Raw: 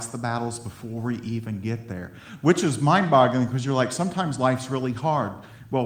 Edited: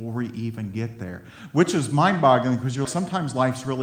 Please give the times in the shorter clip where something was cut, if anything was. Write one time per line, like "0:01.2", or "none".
0:02.9